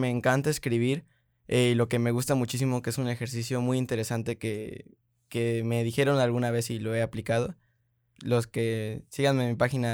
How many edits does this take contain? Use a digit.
1